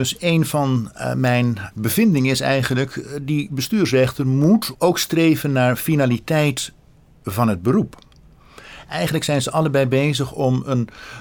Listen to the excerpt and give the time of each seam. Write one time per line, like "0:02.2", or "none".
0:01.7
0:04.7
0:08.9